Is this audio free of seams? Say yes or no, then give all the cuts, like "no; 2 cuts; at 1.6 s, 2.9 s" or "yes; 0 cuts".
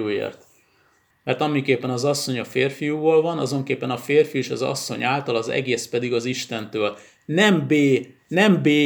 no; 1 cut; at 1.1 s